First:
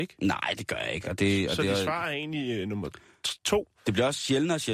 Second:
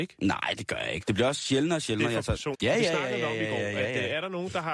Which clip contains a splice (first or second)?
second